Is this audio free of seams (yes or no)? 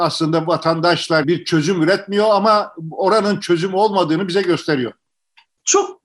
no